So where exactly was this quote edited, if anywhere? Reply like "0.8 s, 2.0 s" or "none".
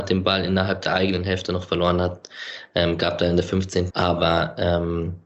3.9 s